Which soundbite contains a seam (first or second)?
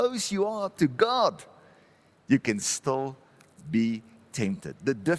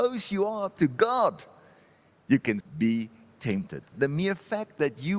second